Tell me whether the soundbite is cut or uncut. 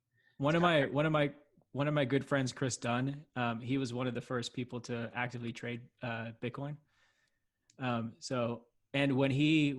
uncut